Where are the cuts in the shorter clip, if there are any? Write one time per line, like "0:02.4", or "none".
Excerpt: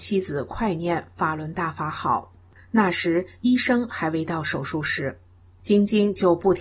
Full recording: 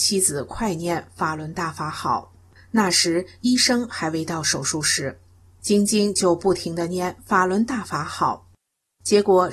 none